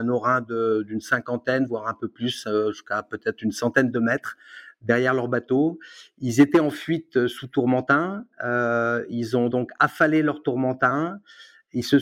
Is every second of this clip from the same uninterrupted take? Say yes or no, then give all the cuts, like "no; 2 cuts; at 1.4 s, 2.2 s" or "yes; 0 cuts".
yes; 0 cuts